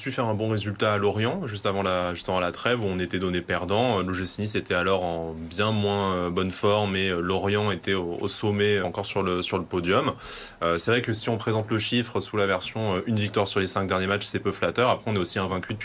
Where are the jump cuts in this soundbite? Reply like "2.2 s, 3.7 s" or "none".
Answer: 8.8 s